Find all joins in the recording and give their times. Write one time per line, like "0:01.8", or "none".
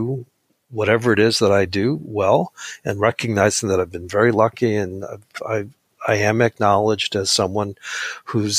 none